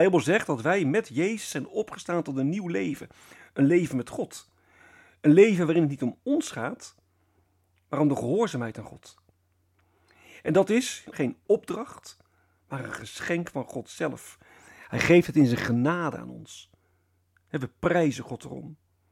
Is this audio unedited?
no; 1 cut; at 11.1 s

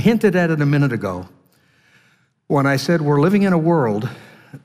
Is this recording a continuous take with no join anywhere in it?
yes; 0 cuts

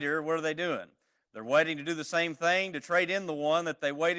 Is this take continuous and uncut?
yes; 0 cuts

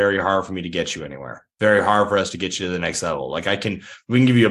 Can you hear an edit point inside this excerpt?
no; 0 cuts

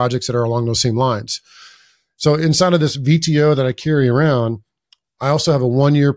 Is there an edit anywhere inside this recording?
no; 0 cuts

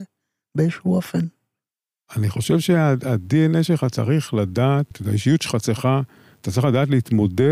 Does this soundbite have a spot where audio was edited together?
yes; 1 cut; at 4.9 s

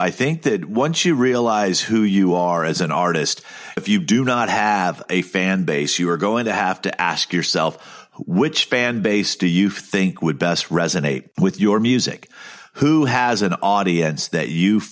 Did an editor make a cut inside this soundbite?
yes; 1 cut; at 3.8 s

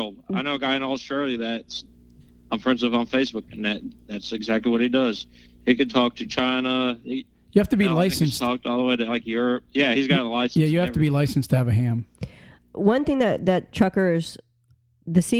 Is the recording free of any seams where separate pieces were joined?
yes; 0 cuts

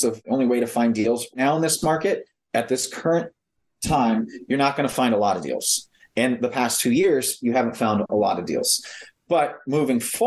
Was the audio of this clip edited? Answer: no; 0 cuts

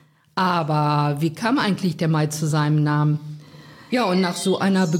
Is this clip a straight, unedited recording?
no; 1 cut; at 3.9 s

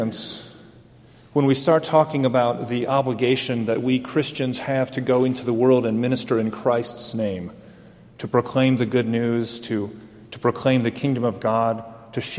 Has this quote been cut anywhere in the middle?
no; 0 cuts

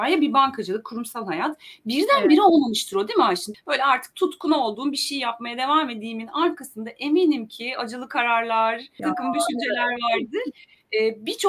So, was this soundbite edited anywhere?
yes; 2 cuts; at 3.5 s, 9.0 s

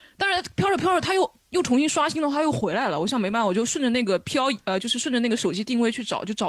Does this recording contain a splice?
no; 0 cuts

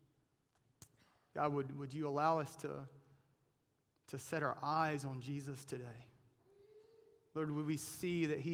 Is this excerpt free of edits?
yes; 0 cuts

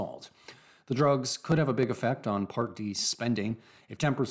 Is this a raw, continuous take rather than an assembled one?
yes; 0 cuts

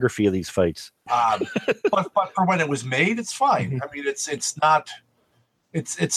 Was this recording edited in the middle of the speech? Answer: yes; 1 cut; at 1.1 s

